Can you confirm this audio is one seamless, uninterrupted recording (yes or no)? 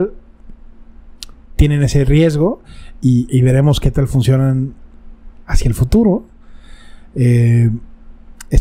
no